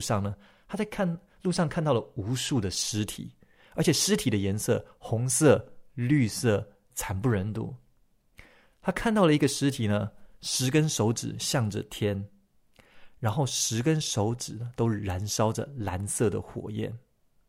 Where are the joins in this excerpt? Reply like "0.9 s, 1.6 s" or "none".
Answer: 6.9 s